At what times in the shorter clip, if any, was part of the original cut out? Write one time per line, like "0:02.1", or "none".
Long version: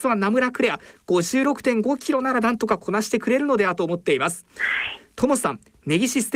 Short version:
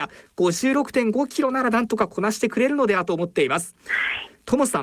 none